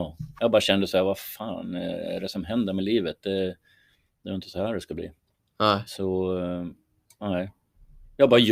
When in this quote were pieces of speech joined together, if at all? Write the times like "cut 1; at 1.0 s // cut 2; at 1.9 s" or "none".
none